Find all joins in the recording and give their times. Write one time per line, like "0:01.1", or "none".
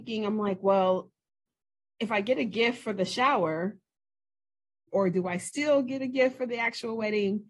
0:04.9